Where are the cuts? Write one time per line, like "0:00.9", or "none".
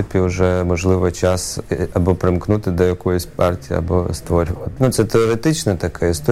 0:04.8